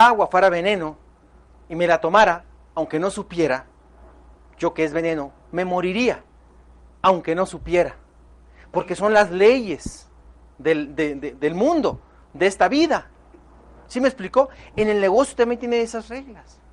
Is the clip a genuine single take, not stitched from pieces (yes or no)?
yes